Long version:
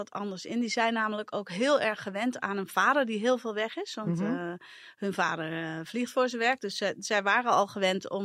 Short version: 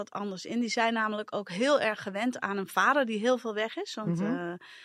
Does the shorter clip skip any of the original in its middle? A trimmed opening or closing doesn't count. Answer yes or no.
no